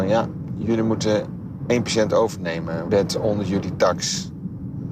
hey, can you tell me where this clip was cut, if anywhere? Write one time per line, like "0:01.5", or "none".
0:02.9